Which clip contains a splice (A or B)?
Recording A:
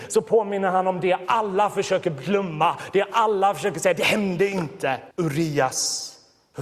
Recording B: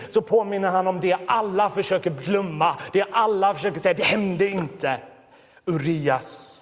A